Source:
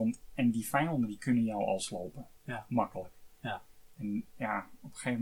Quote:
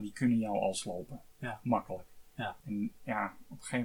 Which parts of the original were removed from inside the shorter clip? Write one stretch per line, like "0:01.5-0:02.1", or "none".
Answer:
0:03.7-0:03.9